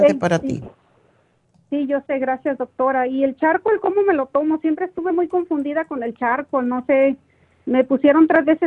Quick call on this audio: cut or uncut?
uncut